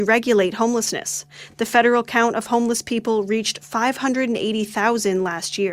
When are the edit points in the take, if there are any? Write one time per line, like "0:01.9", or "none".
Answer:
none